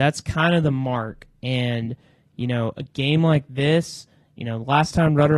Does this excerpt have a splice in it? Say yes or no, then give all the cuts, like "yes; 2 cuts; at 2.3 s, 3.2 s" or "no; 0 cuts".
no; 0 cuts